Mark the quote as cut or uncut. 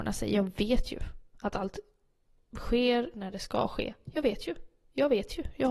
uncut